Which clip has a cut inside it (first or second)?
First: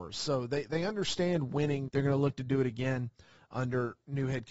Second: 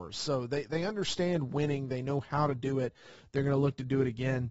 first